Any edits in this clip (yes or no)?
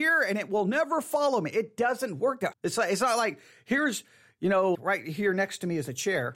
yes